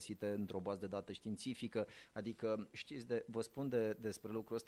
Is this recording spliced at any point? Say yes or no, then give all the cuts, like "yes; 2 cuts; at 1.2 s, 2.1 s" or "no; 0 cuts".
yes; 1 cut; at 2.7 s